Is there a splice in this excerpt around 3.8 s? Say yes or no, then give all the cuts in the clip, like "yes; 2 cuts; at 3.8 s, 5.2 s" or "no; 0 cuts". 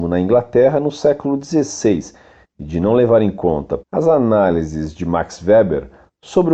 yes; 1 cut; at 3.8 s